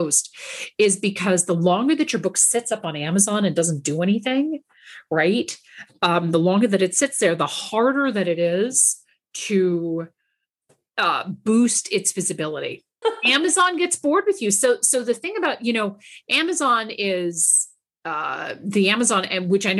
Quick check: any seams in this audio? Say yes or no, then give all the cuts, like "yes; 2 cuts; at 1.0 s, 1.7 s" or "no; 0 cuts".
yes; 1 cut; at 13.0 s